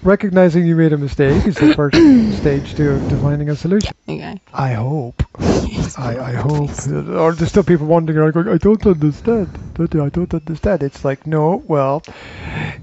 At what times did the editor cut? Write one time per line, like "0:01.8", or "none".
0:03.9